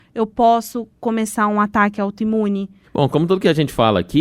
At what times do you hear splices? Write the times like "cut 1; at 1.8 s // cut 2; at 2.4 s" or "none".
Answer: cut 1; at 2.8 s